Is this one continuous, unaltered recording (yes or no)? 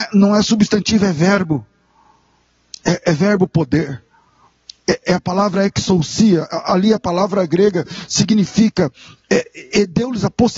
yes